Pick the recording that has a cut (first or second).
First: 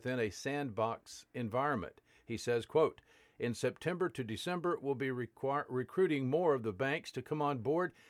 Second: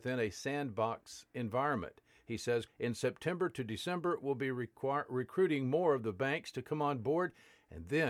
second